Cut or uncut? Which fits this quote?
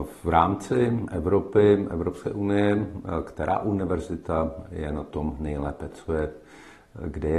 uncut